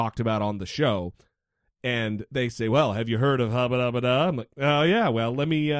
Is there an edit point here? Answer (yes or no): no